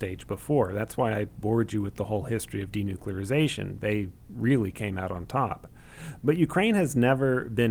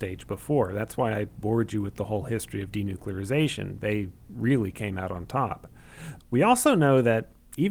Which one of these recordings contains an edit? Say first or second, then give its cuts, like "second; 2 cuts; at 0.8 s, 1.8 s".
second; 1 cut; at 6.2 s